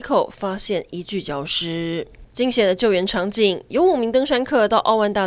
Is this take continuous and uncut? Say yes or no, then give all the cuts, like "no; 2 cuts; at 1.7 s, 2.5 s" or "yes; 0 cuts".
yes; 0 cuts